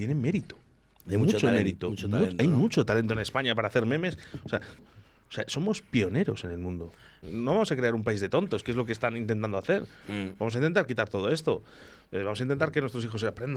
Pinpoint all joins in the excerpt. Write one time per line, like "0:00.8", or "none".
0:04.8
0:07.2